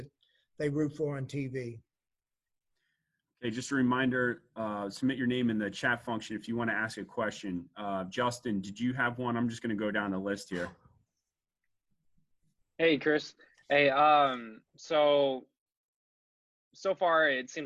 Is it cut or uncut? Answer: cut